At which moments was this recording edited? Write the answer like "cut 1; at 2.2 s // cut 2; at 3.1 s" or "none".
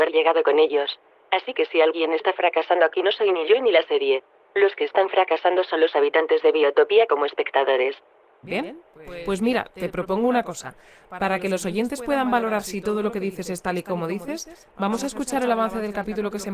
cut 1; at 8.4 s